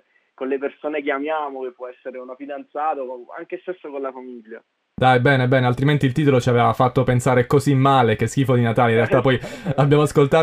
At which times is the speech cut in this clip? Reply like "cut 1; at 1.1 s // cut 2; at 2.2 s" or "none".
none